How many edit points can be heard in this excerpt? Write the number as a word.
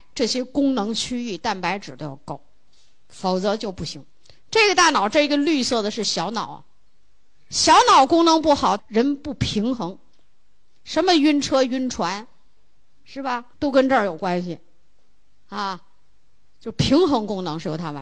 two